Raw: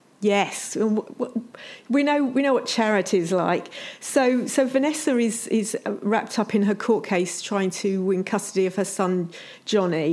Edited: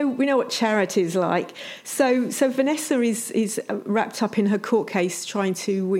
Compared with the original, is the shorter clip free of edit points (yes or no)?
yes